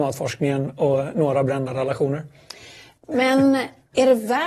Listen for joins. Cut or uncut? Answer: uncut